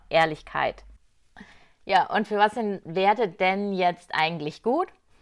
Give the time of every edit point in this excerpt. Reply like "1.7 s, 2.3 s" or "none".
none